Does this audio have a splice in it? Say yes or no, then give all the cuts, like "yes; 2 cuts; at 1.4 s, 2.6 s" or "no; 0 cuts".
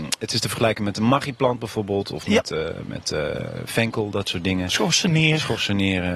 no; 0 cuts